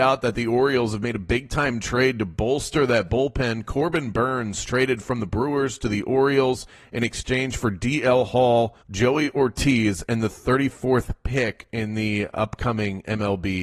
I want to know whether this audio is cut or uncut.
cut